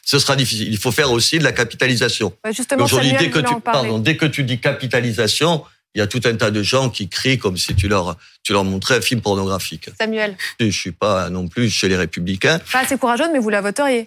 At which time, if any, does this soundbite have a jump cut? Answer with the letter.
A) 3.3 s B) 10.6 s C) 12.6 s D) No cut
B